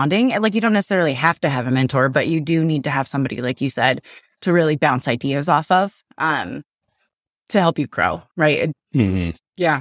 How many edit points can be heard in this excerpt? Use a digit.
1